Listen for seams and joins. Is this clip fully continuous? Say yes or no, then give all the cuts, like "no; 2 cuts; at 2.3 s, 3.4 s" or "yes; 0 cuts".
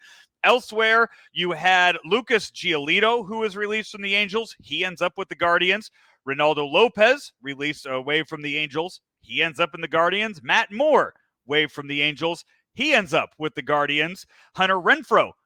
yes; 0 cuts